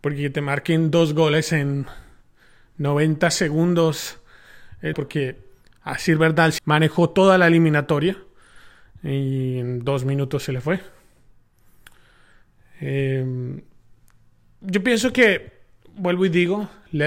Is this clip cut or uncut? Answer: cut